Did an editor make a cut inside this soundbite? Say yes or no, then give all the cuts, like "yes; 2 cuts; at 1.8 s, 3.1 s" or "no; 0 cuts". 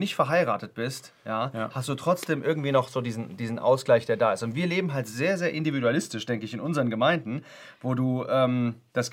no; 0 cuts